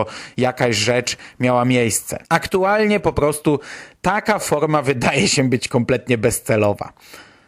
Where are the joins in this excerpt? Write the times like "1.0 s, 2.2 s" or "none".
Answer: 2.2 s